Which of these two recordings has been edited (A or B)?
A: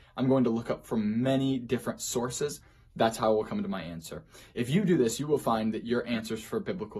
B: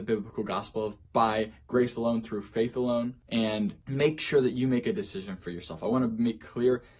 B